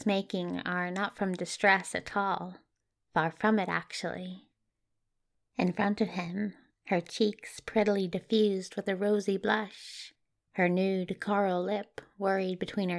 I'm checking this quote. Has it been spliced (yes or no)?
yes